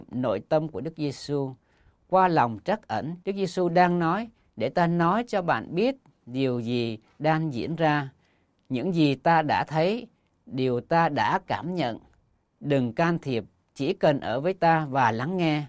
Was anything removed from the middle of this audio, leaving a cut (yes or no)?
yes